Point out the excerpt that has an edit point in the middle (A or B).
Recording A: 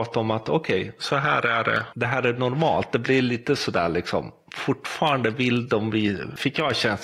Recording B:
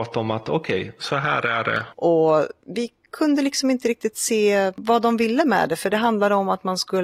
B